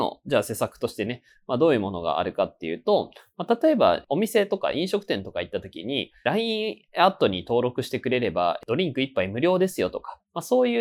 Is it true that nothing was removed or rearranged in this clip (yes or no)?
yes